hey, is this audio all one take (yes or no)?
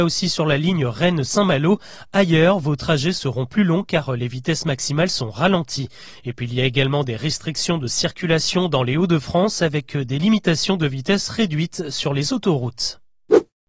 yes